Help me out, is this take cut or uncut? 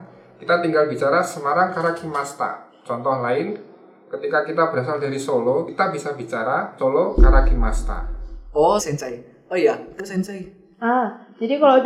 cut